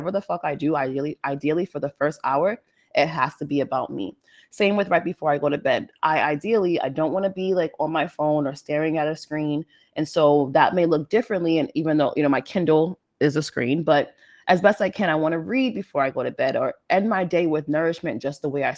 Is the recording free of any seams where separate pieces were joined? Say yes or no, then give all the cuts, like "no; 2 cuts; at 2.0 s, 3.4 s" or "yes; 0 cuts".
yes; 0 cuts